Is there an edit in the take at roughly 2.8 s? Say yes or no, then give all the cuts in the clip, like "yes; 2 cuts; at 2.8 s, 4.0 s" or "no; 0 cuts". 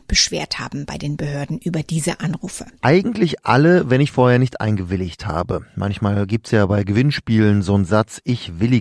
yes; 1 cut; at 2.8 s